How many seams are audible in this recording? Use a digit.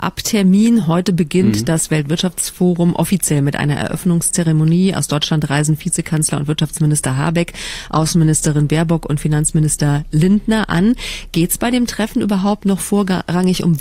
0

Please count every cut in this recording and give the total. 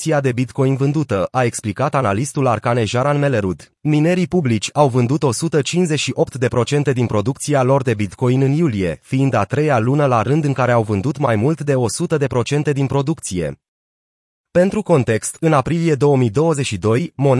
1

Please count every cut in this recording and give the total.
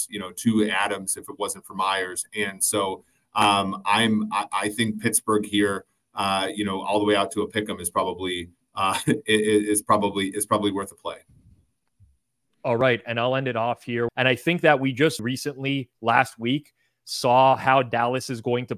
2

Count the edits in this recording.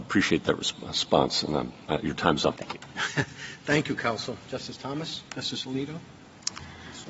2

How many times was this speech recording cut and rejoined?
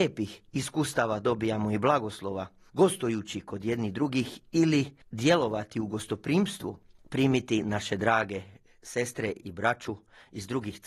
0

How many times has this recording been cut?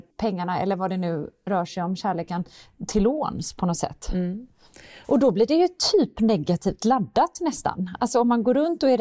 1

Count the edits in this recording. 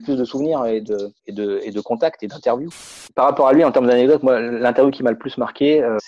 0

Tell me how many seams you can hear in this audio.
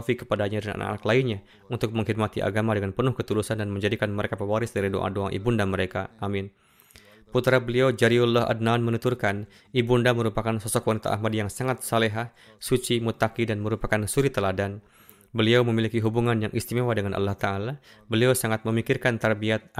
0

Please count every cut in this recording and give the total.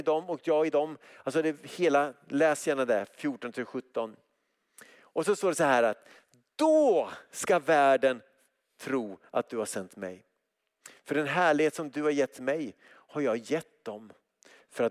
0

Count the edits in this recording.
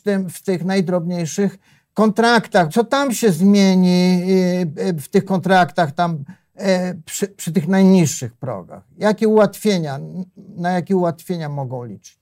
1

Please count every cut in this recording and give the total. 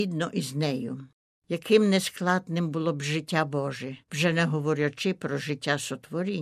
1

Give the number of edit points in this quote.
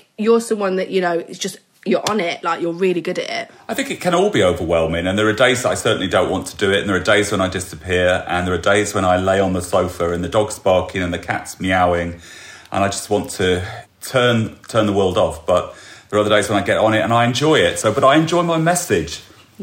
1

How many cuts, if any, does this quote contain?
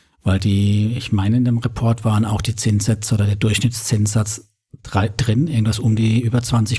0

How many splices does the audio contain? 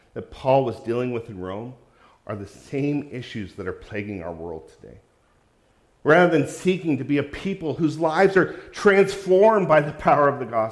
0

